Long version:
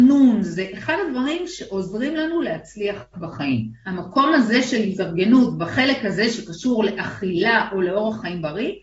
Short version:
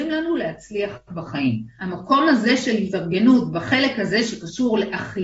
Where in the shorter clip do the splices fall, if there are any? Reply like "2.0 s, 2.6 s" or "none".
none